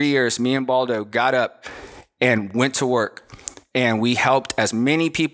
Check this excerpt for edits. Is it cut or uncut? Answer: uncut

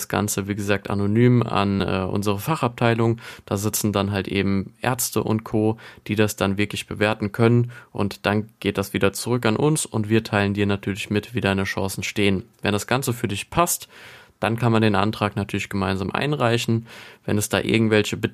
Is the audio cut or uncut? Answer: uncut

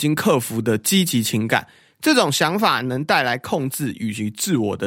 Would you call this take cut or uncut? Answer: uncut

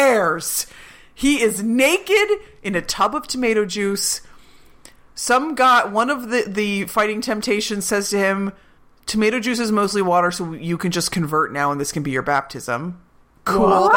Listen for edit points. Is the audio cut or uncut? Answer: uncut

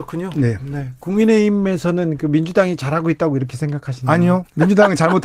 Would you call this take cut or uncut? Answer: uncut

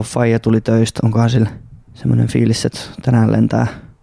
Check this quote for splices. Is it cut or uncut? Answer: cut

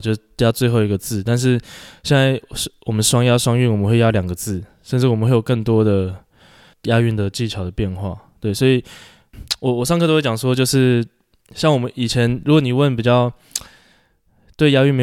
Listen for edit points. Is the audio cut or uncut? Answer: uncut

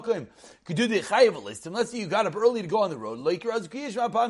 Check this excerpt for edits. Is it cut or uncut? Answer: uncut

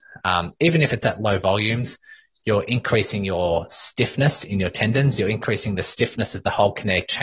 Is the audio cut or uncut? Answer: uncut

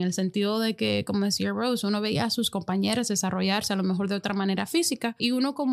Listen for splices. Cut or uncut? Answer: uncut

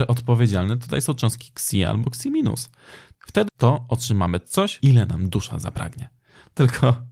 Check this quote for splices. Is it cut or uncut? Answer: cut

